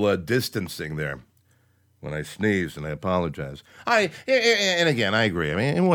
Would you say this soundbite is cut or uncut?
uncut